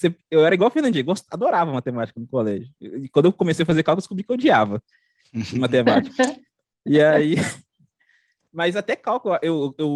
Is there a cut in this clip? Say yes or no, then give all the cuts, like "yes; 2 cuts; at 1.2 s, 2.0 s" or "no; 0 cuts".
no; 0 cuts